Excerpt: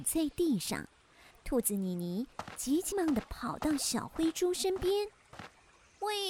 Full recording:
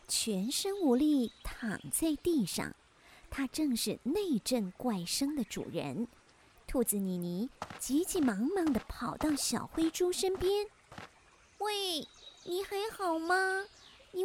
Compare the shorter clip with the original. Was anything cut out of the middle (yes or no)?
yes